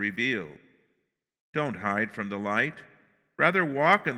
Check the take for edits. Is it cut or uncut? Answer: uncut